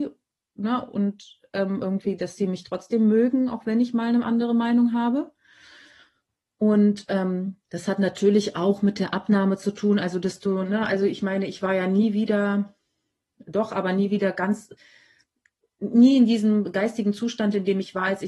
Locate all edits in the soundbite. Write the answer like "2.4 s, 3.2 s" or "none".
none